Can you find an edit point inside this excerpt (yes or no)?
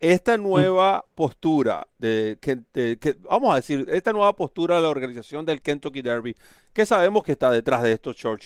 no